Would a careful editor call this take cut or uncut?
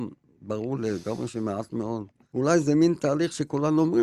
cut